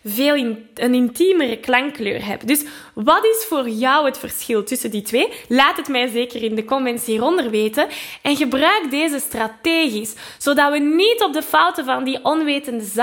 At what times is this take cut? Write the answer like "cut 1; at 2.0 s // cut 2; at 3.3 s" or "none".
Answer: none